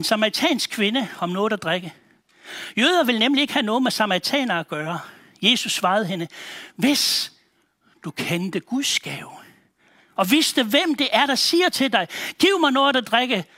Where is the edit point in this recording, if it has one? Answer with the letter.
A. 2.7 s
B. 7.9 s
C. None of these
C